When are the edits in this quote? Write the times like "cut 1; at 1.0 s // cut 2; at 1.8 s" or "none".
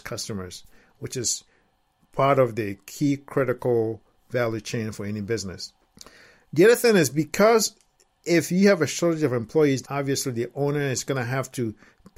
cut 1; at 9.8 s